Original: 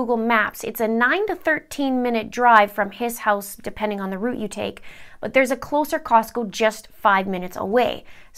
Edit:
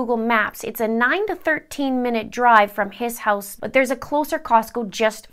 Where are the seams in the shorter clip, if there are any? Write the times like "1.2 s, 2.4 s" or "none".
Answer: 3.6 s